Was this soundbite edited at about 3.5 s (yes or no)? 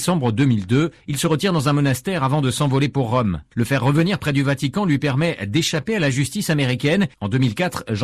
no